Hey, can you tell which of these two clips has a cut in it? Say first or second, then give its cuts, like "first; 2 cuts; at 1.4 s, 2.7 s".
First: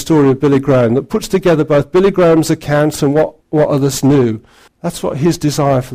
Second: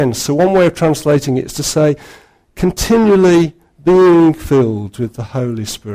first; 2 cuts; at 3.4 s, 4.7 s